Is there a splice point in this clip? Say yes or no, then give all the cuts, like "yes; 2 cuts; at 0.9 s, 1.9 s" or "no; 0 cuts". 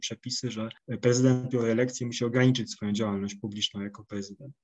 yes; 1 cut; at 1.5 s